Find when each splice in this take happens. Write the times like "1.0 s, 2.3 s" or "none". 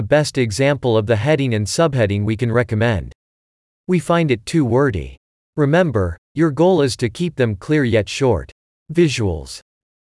none